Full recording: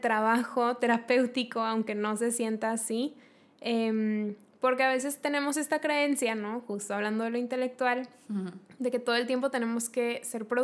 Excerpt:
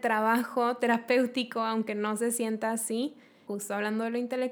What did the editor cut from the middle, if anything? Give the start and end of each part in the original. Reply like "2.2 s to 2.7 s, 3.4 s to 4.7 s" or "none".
3.5 s to 6.7 s